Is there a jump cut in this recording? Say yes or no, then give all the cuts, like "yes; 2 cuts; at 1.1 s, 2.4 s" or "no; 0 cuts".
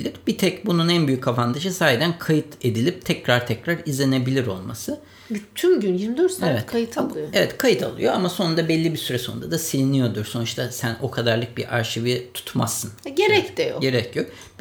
no; 0 cuts